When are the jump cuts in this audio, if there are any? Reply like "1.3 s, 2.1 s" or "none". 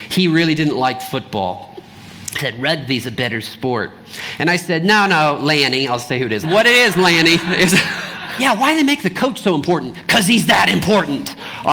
6.4 s, 8.4 s